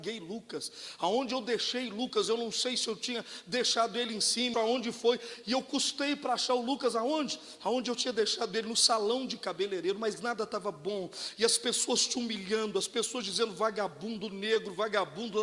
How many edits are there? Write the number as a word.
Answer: one